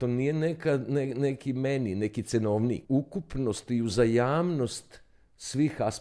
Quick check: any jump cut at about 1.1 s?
no; 1 cut; at 2.8 s

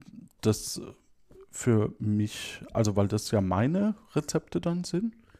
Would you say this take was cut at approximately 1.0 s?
no; 0 cuts

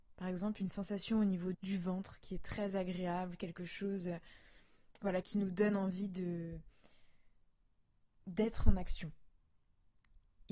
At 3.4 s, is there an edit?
no; 2 cuts; at 1.5 s, 5.2 s

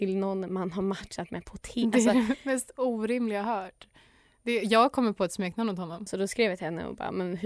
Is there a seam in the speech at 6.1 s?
yes; 1 cut; at 6.1 s

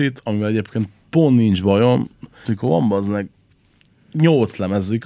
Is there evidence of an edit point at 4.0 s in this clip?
no; 1 cut; at 2.4 s

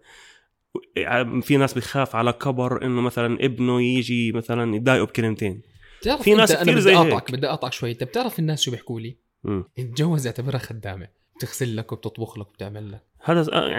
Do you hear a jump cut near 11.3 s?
yes; 2 cuts; at 9.7 s, 11.3 s

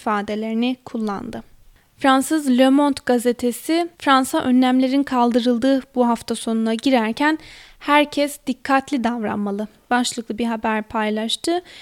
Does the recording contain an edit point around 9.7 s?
no; 1 cut; at 3.9 s

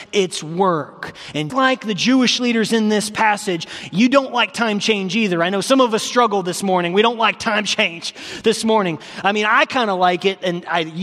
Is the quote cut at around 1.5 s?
yes; 1 cut; at 1.5 s

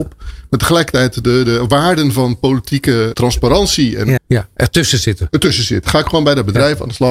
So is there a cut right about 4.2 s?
yes; 3 cuts; at 1.2 s, 3.1 s, 4.2 s

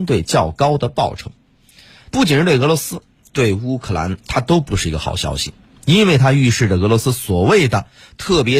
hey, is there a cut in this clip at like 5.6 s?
no; 2 cuts; at 2.1 s, 4.2 s

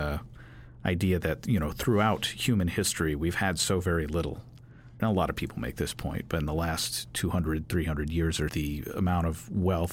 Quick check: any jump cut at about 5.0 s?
yes; 2 cuts; at 5.0 s, 8.5 s

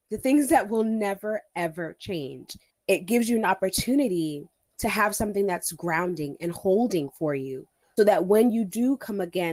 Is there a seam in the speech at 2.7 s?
yes; 2 cuts; at 2.7 s, 8.0 s

